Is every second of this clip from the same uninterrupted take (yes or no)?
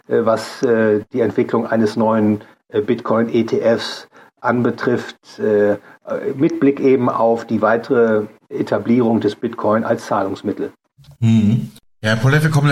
yes